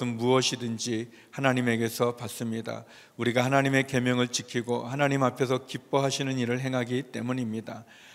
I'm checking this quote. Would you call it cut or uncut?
uncut